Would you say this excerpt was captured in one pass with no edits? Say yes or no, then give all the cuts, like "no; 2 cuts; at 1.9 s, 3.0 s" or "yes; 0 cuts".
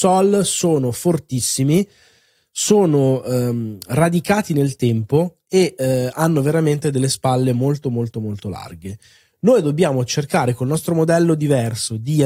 yes; 0 cuts